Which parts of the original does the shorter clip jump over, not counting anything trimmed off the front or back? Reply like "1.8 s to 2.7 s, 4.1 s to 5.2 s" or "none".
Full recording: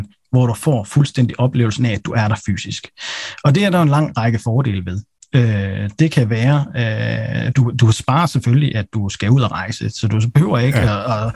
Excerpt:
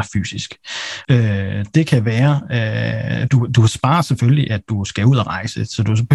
3.4 s to 5.3 s